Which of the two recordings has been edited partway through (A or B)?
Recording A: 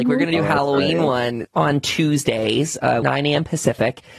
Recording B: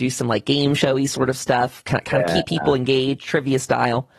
A